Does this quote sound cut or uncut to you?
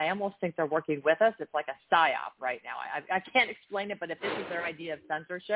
uncut